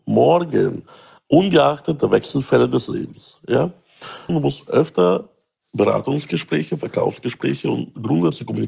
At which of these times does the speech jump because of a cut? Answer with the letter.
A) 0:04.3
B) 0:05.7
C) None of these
A